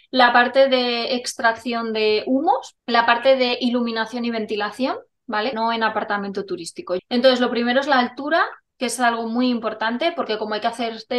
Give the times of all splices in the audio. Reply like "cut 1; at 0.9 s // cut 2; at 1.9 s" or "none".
cut 1; at 2.8 s // cut 2; at 5.5 s // cut 3; at 7.0 s

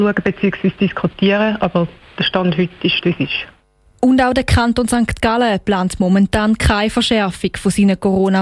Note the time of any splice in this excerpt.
cut 1; at 3.0 s

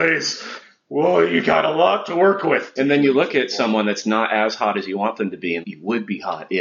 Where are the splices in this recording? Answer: cut 1; at 2.8 s // cut 2; at 5.6 s

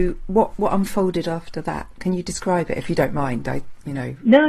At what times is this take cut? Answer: none

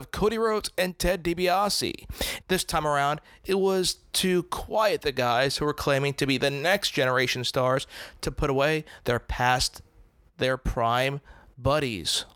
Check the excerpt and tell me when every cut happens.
cut 1; at 2.4 s

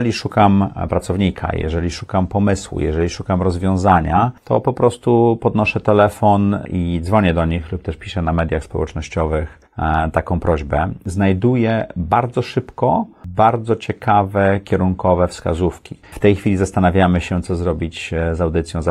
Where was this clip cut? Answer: cut 1; at 16.0 s

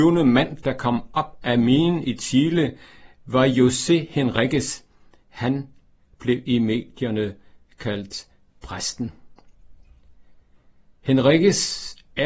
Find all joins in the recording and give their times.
none

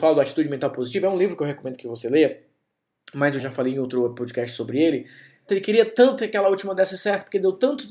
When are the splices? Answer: cut 1; at 3.4 s // cut 2; at 5.5 s

